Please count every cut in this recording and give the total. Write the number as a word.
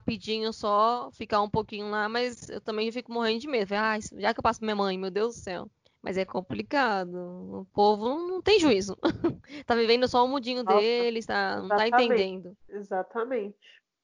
one